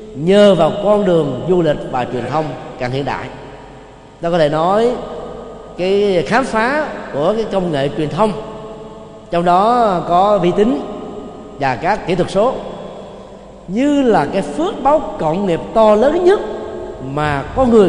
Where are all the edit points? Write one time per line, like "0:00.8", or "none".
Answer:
0:05.8